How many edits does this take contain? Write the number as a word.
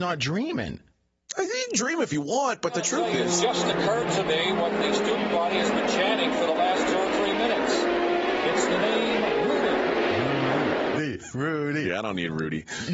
one